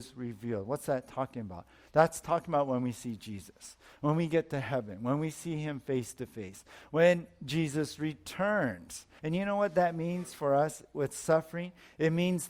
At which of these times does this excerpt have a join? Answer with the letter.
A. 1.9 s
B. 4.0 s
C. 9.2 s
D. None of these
C